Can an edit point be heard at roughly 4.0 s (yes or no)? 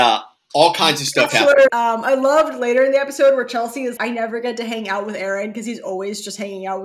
yes